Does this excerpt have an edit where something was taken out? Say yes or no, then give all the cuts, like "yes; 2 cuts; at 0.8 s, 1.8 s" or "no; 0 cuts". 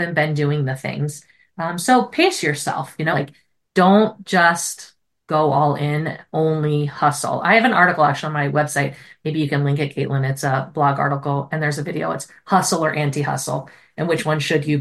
yes; 1 cut; at 3.1 s